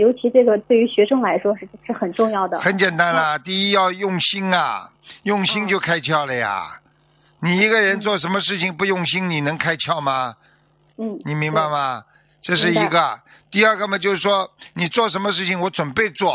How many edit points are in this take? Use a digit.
1